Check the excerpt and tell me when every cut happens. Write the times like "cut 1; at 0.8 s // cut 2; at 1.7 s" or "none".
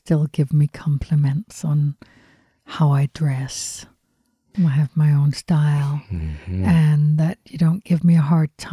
none